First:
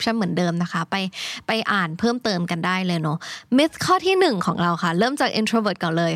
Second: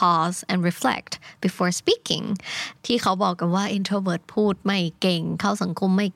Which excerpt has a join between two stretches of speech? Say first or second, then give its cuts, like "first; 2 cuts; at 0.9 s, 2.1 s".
second; 1 cut; at 2.8 s